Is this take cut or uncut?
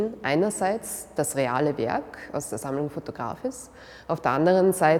uncut